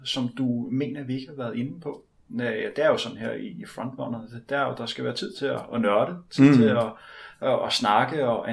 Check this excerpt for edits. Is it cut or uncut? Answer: uncut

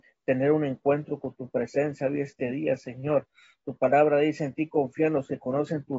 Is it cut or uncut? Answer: uncut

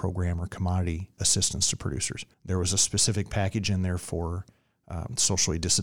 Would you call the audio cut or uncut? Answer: cut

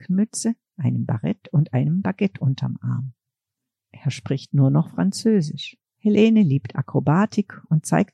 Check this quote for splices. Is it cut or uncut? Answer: cut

